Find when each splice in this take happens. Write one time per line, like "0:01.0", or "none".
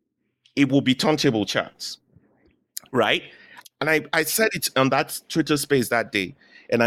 0:03.6